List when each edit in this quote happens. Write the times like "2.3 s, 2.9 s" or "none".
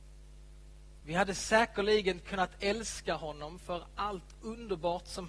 1.0 s